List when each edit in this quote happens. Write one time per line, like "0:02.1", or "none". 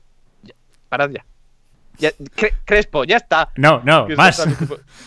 none